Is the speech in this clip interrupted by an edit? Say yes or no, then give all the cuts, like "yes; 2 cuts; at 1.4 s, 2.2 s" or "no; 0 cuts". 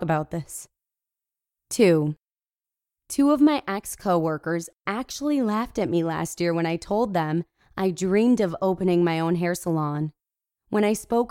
no; 0 cuts